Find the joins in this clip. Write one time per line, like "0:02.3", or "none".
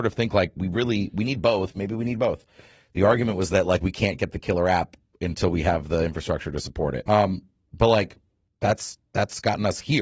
0:07.1